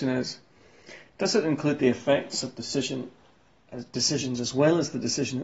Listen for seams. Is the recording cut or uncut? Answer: uncut